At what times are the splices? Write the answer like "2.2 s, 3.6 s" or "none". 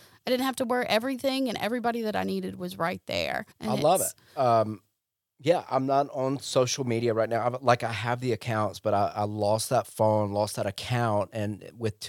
3.5 s